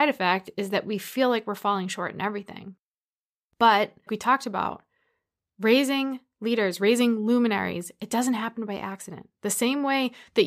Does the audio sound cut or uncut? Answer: cut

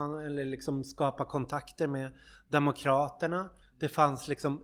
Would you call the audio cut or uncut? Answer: cut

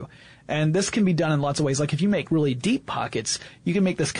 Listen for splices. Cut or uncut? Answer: uncut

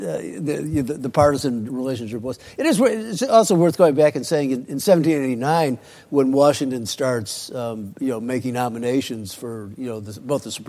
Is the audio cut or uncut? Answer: uncut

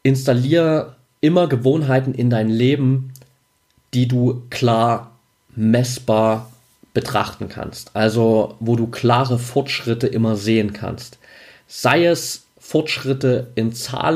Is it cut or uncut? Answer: uncut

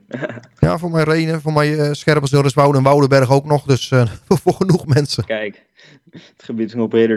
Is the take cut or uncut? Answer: uncut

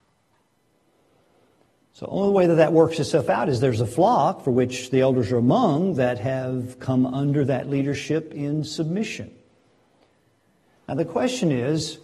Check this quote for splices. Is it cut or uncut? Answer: uncut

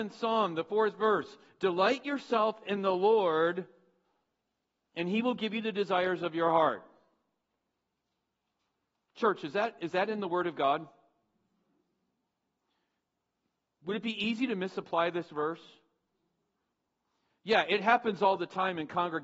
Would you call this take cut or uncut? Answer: uncut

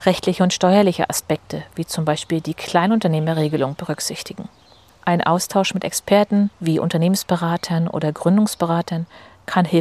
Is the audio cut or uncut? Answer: uncut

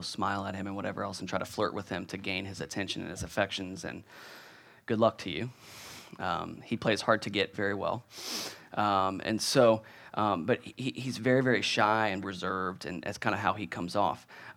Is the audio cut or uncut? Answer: cut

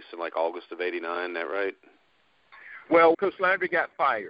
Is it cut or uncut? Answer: cut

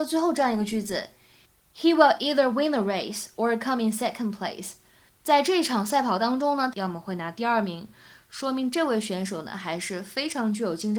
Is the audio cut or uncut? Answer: cut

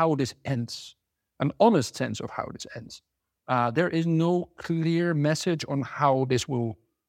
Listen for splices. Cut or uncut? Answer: cut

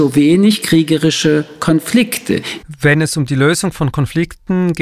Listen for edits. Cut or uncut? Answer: cut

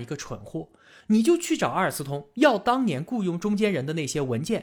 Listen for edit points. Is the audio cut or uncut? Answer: cut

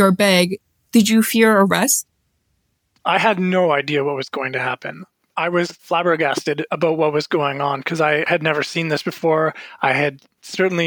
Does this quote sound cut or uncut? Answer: uncut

